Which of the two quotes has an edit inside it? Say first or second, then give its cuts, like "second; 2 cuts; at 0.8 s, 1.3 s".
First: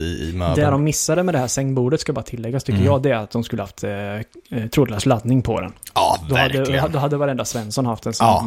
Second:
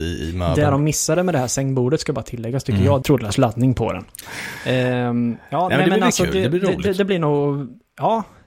second; 2 cuts; at 3.0 s, 4.2 s